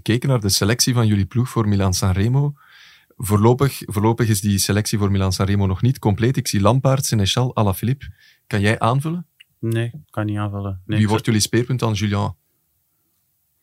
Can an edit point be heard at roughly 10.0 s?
yes; 1 cut; at 10.0 s

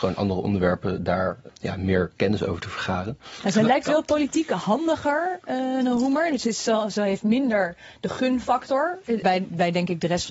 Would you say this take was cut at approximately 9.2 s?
yes; 1 cut; at 9.2 s

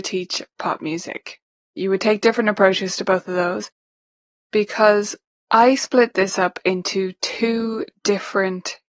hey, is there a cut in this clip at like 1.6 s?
yes; 2 cuts; at 1.6 s, 4.3 s

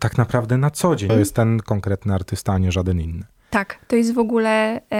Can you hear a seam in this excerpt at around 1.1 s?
yes; 1 cut; at 1.1 s

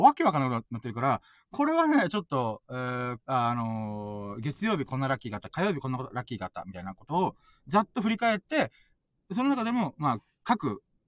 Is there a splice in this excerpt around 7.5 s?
no; 1 cut; at 3.2 s

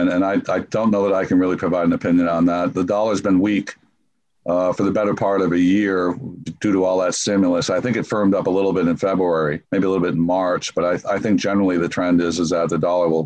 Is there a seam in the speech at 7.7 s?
no; 1 cut; at 9.6 s

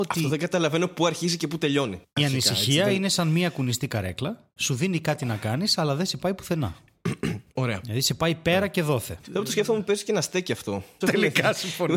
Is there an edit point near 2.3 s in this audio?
no; 3 cuts; at 7.5 s, 9.2 s, 11.0 s

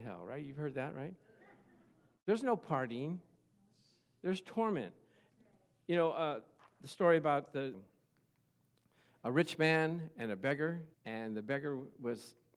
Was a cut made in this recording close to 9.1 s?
no; 2 cuts; at 7.7 s, 10.9 s

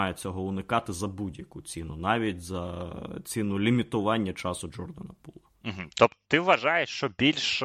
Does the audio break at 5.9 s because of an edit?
no; 0 cuts

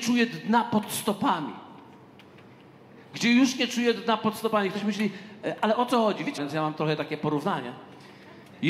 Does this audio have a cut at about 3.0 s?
no; 1 cut; at 6.4 s

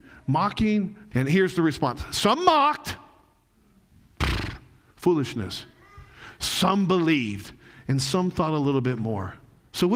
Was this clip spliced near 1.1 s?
yes; 1 cut; at 1.1 s

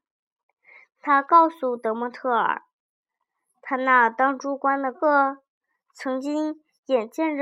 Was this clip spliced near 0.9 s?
no; 1 cut; at 4.9 s

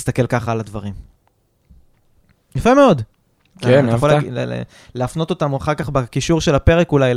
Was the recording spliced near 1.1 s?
no; 1 cut; at 3.5 s

